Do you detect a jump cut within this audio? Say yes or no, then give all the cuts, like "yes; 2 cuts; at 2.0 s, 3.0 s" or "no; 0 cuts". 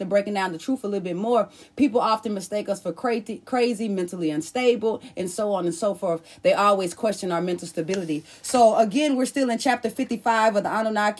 no; 0 cuts